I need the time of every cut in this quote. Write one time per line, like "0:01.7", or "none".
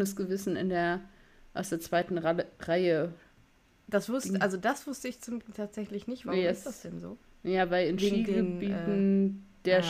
none